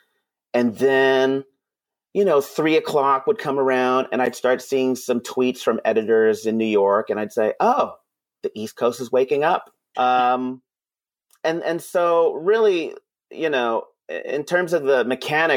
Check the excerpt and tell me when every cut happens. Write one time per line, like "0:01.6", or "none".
0:09.9

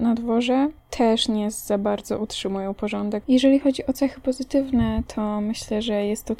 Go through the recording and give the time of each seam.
0:03.2

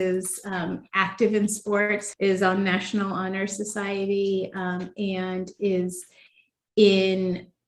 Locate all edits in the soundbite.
0:02.1

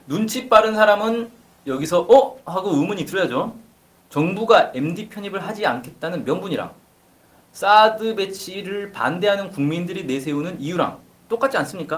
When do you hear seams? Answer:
none

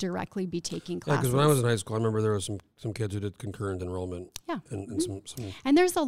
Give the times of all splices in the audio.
none

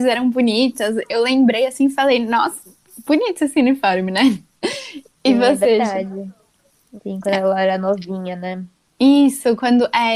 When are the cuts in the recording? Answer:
0:07.0

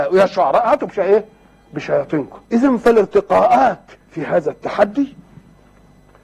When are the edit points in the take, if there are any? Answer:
0:02.4
0:04.0

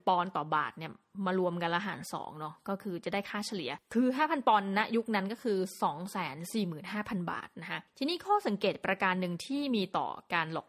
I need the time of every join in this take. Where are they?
none

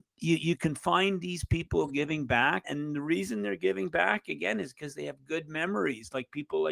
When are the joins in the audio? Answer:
0:02.6

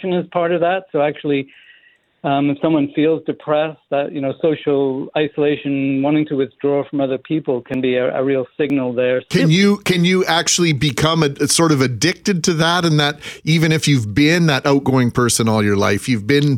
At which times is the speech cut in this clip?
0:09.3

